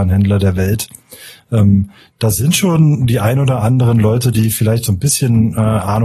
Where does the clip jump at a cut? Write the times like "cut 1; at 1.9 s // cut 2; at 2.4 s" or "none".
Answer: none